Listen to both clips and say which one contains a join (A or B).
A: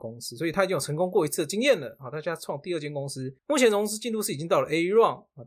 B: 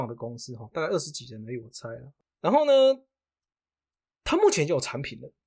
A